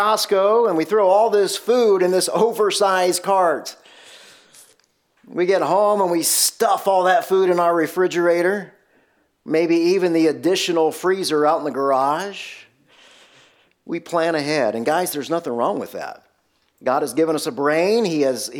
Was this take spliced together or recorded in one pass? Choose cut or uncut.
uncut